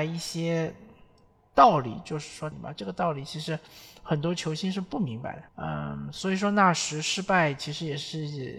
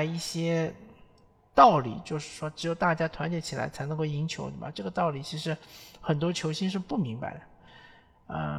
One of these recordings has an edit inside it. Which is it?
first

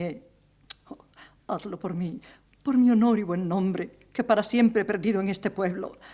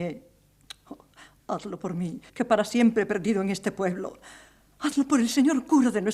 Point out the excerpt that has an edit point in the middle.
second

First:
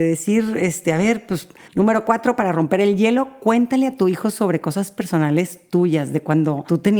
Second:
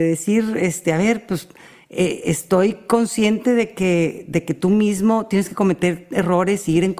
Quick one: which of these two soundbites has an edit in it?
first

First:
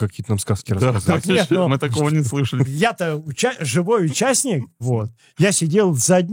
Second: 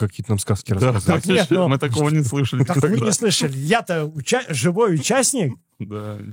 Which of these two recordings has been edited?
first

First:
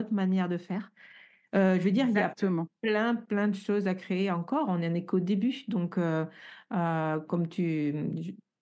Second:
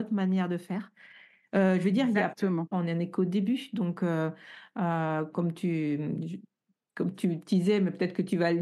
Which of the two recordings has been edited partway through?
second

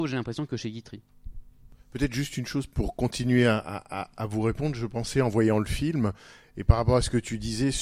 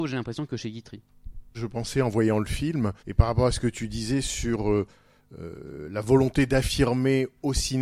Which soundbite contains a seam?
second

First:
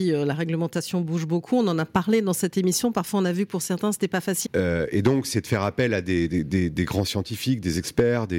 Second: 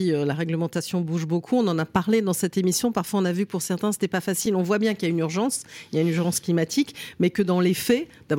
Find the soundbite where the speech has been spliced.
first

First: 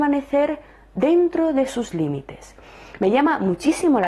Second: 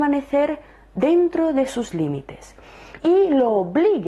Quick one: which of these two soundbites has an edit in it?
second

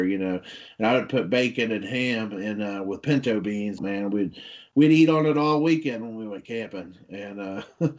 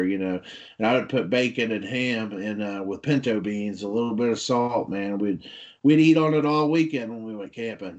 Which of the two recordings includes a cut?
first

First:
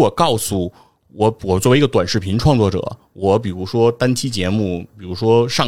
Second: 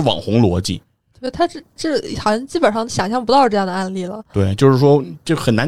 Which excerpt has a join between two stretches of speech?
second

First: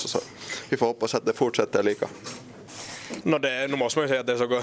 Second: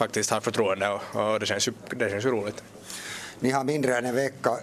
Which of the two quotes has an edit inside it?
first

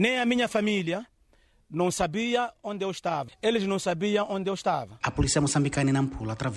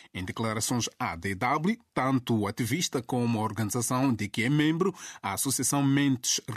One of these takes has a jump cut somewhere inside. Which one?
first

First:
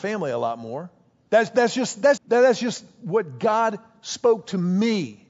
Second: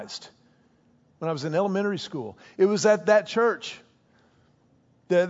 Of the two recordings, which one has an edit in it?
first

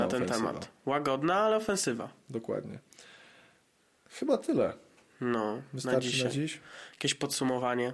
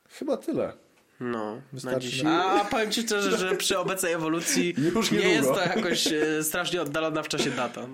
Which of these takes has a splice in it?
second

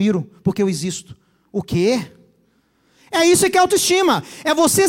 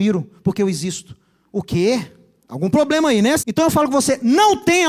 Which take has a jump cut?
second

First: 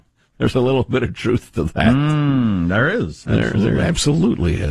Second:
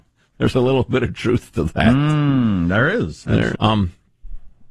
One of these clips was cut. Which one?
second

